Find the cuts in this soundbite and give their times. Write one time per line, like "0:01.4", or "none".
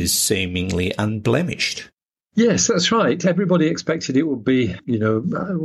none